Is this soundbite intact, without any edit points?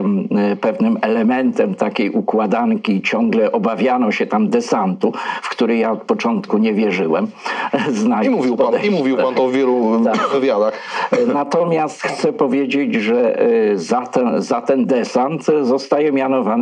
yes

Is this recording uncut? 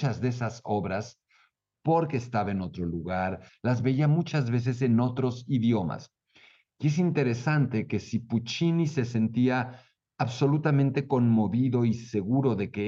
no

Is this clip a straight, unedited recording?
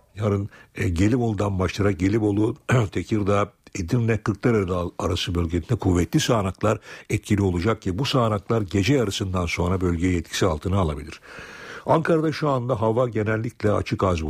yes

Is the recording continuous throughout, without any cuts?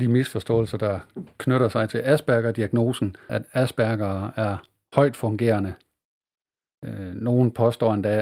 no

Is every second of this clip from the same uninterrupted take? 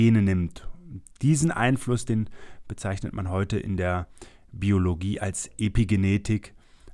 yes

